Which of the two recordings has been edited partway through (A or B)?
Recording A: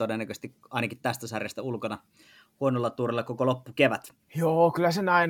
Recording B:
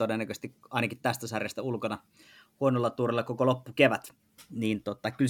A